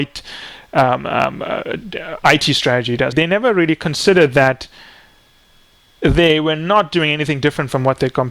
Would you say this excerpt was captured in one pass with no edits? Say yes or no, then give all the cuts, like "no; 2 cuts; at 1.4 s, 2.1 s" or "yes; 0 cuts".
no; 1 cut; at 3.1 s